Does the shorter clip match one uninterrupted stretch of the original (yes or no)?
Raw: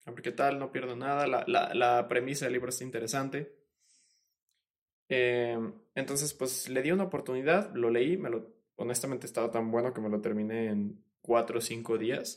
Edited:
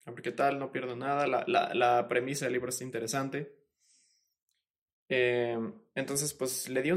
yes